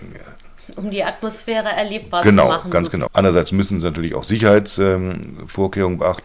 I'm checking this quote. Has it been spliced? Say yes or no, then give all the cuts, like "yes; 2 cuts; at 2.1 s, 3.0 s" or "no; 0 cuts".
yes; 1 cut; at 3.1 s